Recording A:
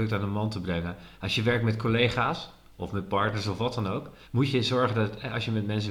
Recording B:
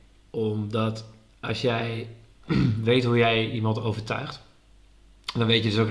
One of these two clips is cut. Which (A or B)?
A